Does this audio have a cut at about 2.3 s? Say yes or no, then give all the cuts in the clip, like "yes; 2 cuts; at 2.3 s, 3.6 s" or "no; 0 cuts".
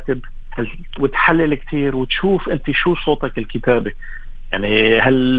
no; 1 cut; at 1.0 s